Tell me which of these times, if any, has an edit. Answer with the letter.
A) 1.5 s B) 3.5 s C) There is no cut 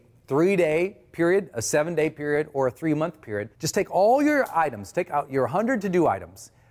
B